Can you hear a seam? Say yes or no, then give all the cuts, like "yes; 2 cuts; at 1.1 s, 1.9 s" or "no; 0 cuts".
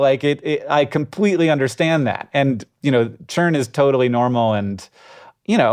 no; 0 cuts